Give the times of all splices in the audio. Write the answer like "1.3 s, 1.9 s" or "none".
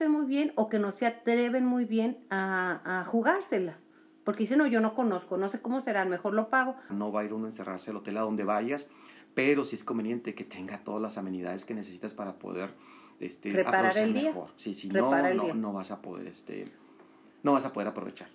6.9 s